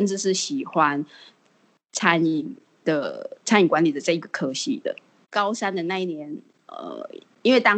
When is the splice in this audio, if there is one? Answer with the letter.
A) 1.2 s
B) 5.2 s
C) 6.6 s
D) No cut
B